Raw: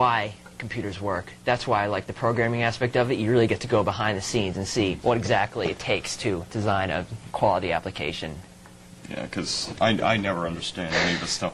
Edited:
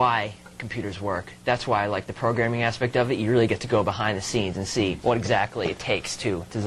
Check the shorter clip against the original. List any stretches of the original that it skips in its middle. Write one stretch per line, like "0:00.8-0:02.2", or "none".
none